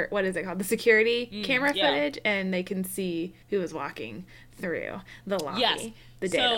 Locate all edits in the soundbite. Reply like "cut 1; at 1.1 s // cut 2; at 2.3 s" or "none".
cut 1; at 3.4 s

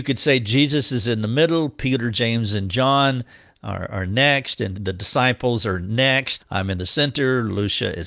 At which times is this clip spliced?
cut 1; at 4.7 s // cut 2; at 6.4 s

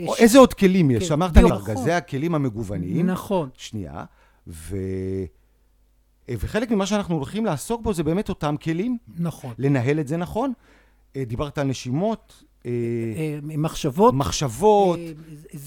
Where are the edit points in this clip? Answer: cut 1; at 1.5 s // cut 2; at 6.2 s

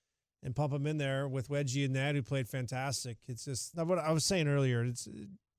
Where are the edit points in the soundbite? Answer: cut 1; at 3.7 s

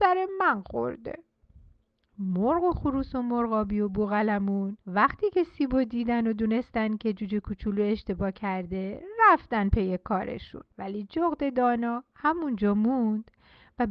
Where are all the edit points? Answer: cut 1; at 4.8 s // cut 2; at 10.7 s

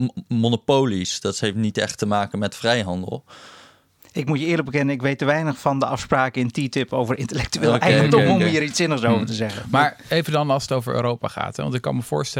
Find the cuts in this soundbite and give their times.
none

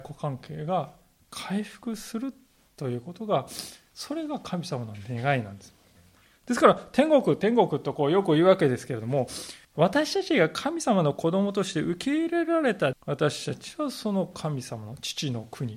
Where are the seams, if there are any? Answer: cut 1; at 6.2 s // cut 2; at 9.6 s // cut 3; at 12.9 s

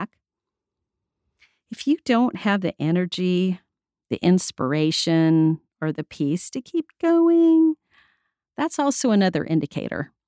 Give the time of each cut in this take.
none

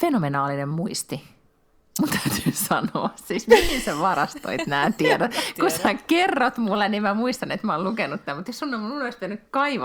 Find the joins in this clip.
none

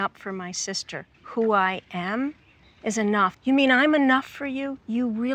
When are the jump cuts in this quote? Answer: cut 1; at 1.1 s // cut 2; at 3.3 s

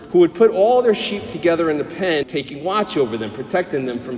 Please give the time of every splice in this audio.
cut 1; at 2.2 s

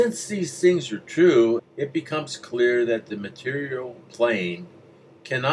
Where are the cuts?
cut 1; at 1.6 s

